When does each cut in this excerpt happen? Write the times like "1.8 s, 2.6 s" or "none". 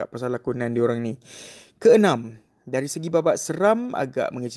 none